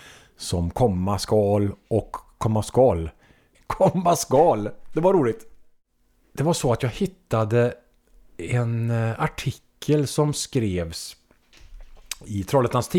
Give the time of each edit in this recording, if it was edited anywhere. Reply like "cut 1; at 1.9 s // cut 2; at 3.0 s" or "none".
cut 1; at 3.5 s